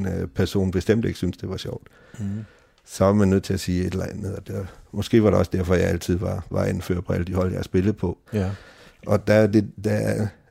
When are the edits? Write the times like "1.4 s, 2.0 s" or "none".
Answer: 8.3 s